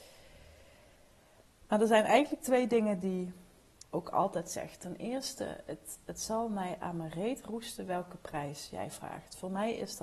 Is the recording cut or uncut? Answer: cut